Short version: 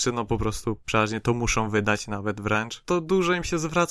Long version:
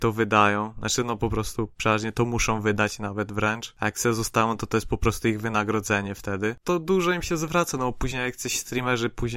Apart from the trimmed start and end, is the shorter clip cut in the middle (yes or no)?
yes